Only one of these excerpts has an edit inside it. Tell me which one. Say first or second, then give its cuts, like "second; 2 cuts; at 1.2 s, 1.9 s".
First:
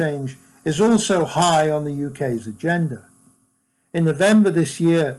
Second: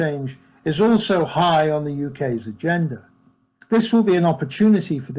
second; 1 cut; at 3.6 s